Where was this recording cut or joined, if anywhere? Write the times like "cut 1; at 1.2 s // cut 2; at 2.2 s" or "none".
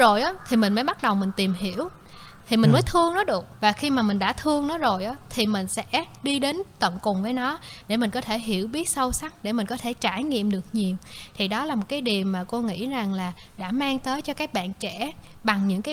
cut 1; at 3.5 s